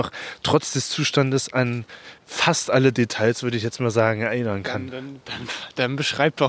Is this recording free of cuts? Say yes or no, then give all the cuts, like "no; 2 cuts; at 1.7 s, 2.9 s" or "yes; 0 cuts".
no; 1 cut; at 2.2 s